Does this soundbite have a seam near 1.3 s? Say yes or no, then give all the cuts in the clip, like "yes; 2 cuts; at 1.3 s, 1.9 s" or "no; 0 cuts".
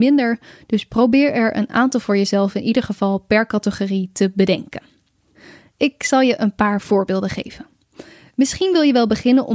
no; 0 cuts